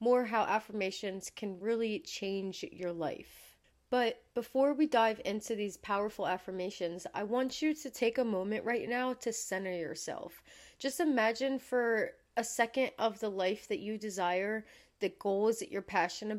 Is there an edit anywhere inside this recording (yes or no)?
no